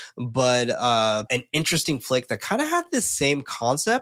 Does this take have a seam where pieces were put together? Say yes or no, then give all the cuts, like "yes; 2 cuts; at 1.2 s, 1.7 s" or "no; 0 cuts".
yes; 1 cut; at 1.3 s